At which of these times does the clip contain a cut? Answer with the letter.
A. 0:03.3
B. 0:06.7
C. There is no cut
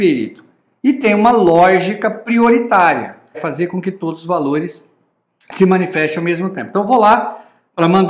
A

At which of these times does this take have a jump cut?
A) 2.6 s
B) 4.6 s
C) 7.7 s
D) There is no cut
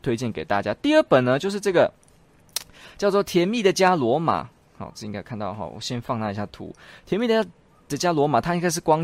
D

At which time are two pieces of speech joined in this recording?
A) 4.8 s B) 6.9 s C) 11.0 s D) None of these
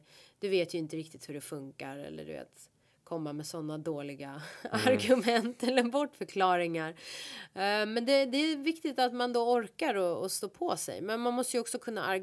D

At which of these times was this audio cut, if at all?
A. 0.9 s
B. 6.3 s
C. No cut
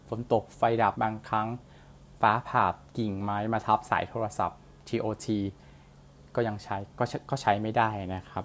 A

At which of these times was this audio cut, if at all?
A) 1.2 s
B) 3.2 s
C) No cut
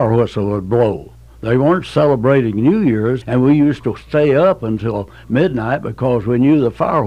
B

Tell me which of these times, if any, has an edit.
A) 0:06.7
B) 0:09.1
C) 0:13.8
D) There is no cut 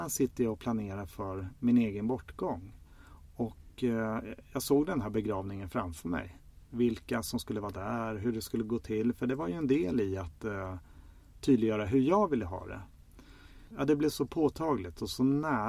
D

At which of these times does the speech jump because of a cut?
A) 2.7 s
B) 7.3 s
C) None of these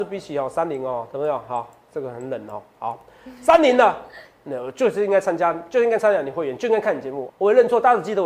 B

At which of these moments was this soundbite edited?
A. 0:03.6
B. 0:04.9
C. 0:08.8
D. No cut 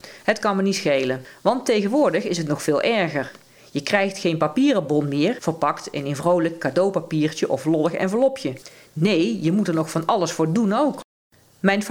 D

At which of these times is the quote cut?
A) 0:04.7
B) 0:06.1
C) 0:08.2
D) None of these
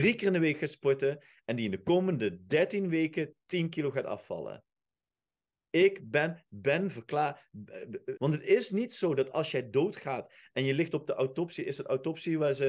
C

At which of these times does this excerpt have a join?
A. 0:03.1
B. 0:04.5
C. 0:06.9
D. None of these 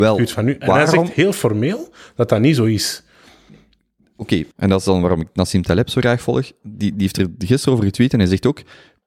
B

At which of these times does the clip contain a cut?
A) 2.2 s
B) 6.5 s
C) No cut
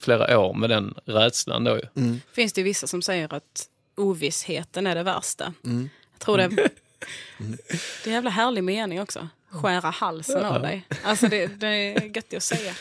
B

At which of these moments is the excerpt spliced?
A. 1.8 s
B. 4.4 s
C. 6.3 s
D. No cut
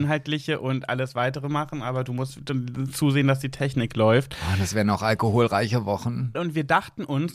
C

